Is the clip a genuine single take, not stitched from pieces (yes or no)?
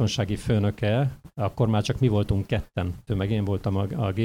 no